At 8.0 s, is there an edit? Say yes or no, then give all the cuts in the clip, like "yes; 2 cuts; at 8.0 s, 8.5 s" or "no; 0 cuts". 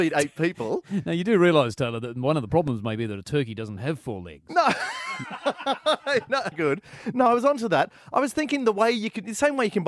no; 1 cut; at 6.5 s